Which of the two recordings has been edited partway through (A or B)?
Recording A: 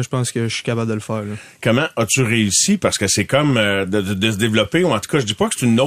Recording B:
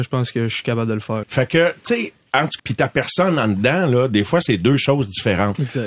B